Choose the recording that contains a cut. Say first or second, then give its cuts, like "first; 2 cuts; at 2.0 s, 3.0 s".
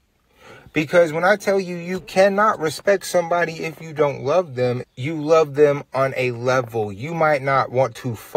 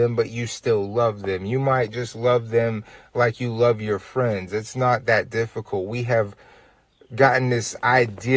first; 1 cut; at 4.8 s